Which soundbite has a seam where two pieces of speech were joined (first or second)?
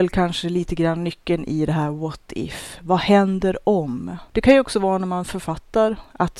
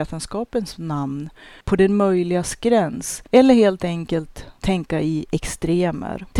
second